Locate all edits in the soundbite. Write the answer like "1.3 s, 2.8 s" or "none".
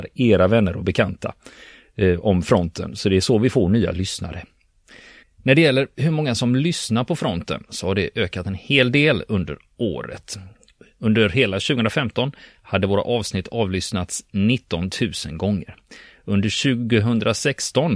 5.2 s